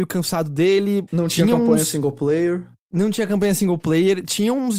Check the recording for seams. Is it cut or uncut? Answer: cut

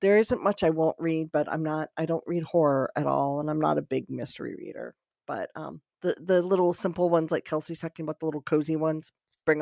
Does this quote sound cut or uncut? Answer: uncut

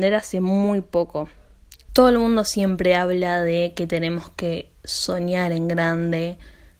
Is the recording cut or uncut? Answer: cut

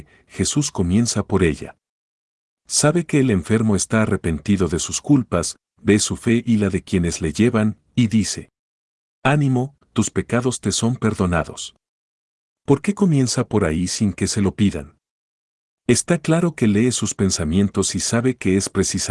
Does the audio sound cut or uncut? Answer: cut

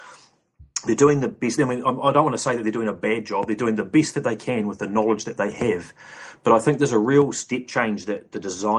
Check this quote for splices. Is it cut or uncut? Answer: uncut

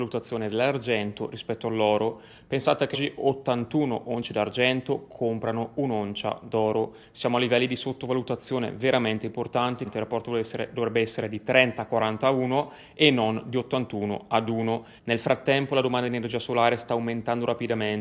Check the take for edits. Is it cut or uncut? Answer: cut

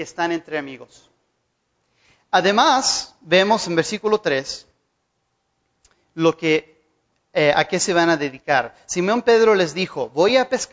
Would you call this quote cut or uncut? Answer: uncut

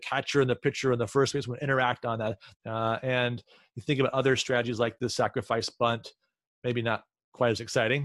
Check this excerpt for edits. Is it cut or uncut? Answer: cut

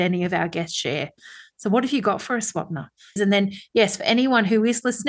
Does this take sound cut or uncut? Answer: cut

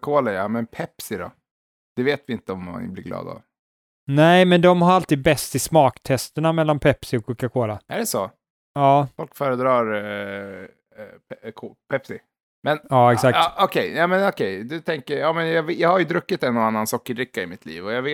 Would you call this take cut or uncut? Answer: uncut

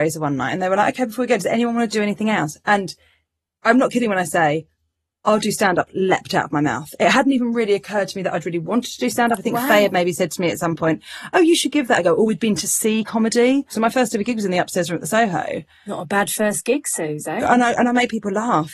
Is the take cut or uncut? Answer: uncut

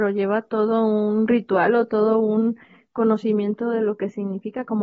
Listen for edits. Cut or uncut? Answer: uncut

